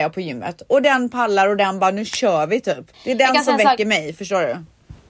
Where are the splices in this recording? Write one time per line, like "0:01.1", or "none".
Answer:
0:02.9